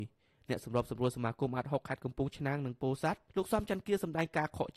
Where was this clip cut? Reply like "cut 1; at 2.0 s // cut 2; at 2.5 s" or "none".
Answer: cut 1; at 3.3 s